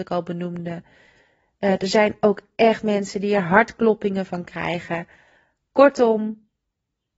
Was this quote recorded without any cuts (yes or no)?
yes